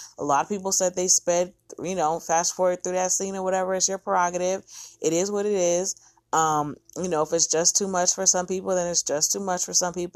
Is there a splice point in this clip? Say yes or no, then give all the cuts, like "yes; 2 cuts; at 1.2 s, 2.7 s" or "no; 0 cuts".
no; 0 cuts